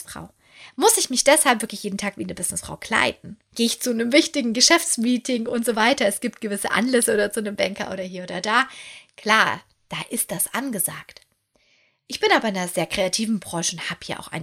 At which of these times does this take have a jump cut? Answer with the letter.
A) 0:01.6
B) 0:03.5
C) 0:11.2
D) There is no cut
B